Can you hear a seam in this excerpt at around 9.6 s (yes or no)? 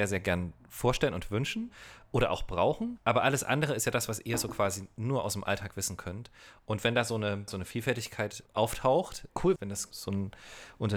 yes